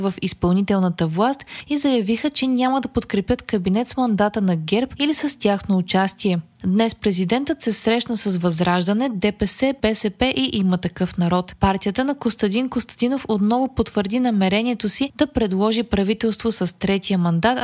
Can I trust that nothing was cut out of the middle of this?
no; 1 cut; at 6.5 s

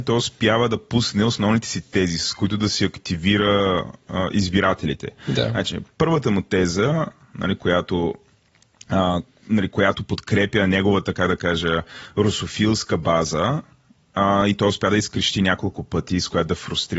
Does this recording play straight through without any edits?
yes; 0 cuts

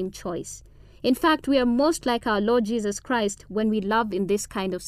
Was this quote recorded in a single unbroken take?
yes; 0 cuts

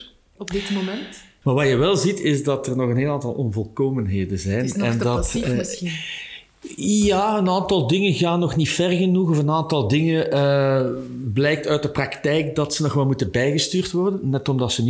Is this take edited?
yes; 1 cut; at 1.4 s

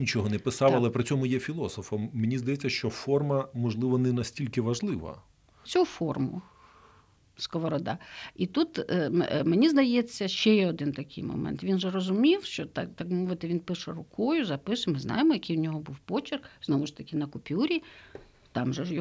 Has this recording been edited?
yes; 1 cut; at 5.7 s

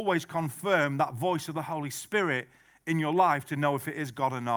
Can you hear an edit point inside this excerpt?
no; 0 cuts

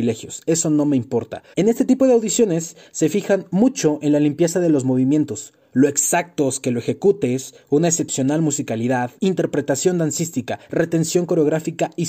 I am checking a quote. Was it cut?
yes; 2 cuts; at 1.5 s, 9.2 s

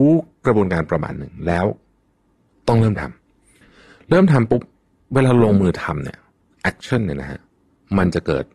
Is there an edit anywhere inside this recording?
no; 0 cuts

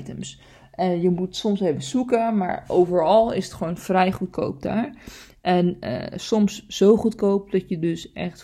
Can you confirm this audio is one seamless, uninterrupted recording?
yes; 0 cuts

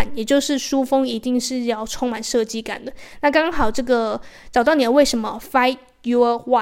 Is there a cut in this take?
no; 0 cuts

